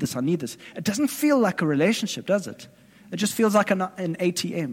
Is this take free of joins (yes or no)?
yes